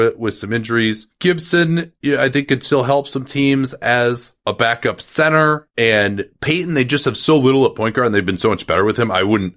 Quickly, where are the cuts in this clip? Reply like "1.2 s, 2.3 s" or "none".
none